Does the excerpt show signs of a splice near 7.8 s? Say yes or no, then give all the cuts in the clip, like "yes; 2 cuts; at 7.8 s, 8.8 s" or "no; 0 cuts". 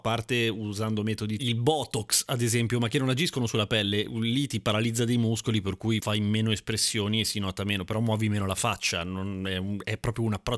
no; 1 cut; at 1.4 s